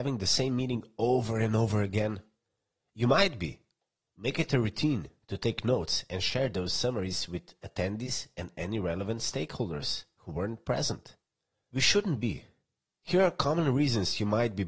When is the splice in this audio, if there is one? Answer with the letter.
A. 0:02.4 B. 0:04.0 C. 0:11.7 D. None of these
C